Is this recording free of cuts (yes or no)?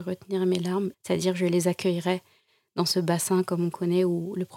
no